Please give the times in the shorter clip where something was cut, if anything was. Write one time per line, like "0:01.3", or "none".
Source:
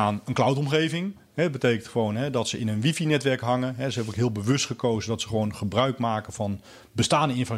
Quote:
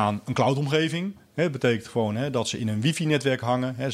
none